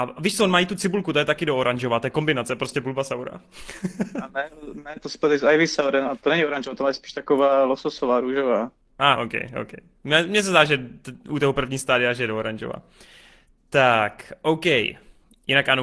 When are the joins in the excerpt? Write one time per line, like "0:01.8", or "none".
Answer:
0:09.2